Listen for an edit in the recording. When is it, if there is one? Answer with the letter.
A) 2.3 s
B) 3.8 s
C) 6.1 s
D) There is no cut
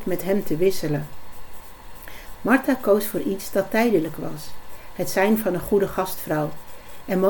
A